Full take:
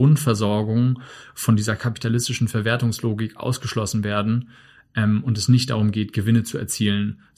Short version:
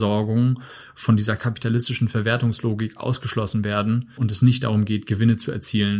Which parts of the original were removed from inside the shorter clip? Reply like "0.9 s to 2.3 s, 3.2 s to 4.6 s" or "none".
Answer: 4.6 s to 5.2 s

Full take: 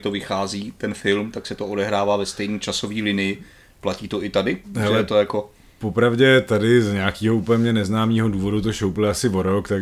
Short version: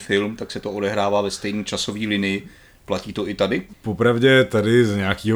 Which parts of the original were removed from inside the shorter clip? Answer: 4.7 s to 5.7 s

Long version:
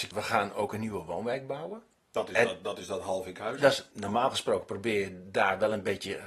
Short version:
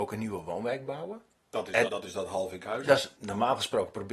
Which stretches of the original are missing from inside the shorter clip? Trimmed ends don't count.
2.5 s to 2.6 s

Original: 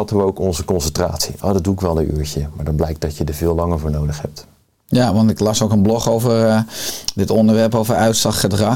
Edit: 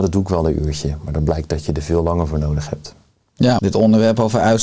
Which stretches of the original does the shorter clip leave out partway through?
5.1 s to 7.1 s

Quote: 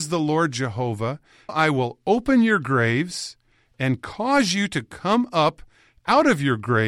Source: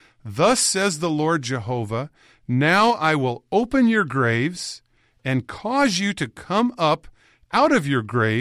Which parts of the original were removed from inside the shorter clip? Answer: 2.4 s to 2.9 s

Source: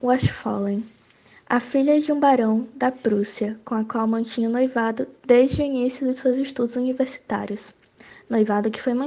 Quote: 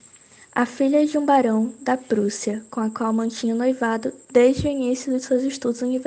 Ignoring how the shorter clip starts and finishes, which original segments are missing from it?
none

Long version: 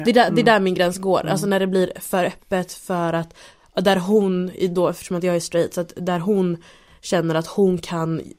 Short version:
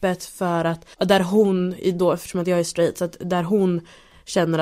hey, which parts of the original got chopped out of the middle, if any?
3.4 s to 3.7 s

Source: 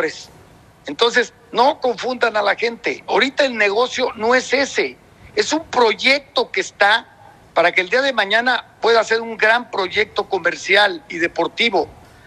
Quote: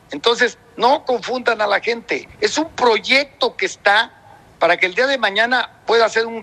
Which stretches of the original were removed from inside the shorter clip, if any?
3.0 s to 5.2 s

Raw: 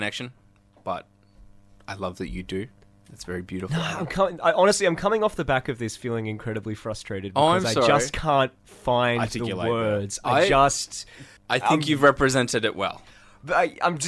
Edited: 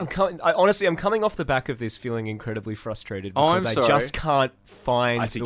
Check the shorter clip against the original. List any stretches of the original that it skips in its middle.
none

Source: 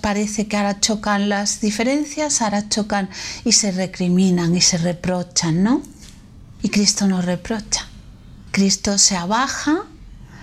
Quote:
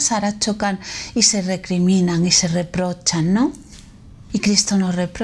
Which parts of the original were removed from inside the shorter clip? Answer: none

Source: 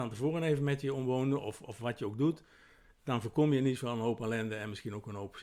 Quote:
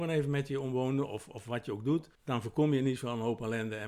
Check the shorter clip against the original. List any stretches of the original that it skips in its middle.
2.5 s to 2.9 s

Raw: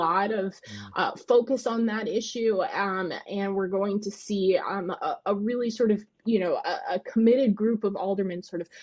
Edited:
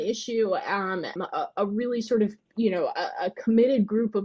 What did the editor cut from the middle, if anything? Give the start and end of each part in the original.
3.2 s to 4.8 s

